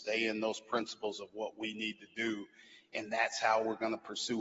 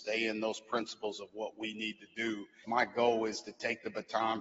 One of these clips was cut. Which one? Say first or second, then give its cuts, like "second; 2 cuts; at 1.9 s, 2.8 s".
second; 1 cut; at 2.6 s